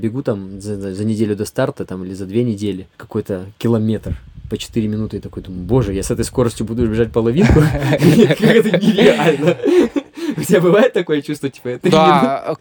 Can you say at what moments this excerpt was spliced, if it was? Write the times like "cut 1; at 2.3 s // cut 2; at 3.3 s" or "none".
cut 1; at 2.9 s

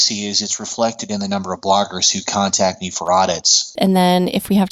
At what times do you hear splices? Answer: cut 1; at 3.8 s

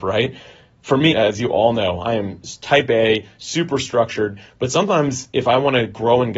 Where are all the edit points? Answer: cut 1; at 1.1 s

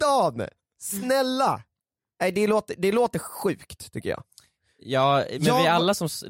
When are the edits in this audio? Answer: none

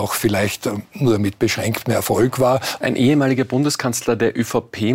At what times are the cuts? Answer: cut 1; at 2.8 s

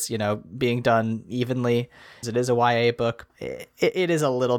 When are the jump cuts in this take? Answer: cut 1; at 2.2 s // cut 2; at 3.3 s

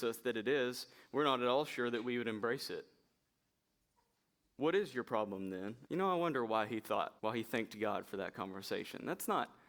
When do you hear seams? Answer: cut 1; at 5.9 s // cut 2; at 7.2 s

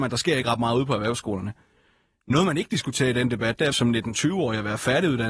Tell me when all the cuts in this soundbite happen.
cut 1; at 3.7 s

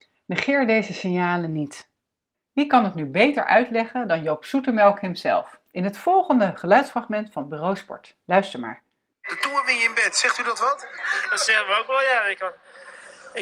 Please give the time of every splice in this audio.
none

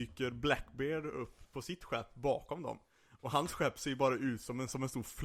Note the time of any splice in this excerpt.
none

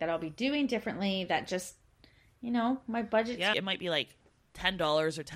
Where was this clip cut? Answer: cut 1; at 3.5 s

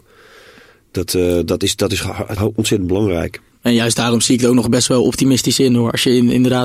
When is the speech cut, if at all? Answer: cut 1; at 2.4 s // cut 2; at 3.5 s

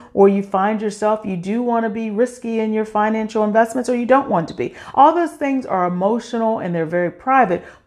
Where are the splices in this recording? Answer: none

